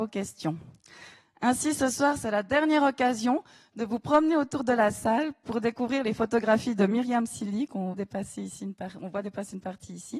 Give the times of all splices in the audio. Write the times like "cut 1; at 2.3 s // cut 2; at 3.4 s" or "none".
cut 1; at 7.9 s